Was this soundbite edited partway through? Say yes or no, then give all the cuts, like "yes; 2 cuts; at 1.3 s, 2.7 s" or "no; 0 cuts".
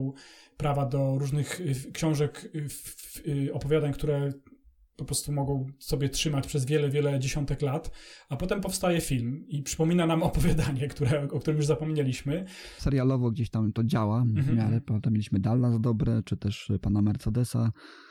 yes; 1 cut; at 12.8 s